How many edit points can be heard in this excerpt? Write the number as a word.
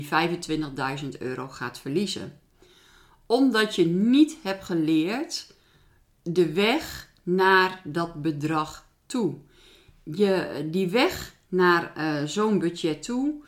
zero